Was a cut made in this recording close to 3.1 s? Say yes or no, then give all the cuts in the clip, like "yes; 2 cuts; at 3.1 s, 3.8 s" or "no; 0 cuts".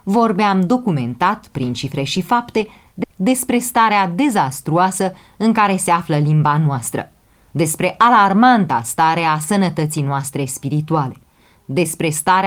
yes; 1 cut; at 3.1 s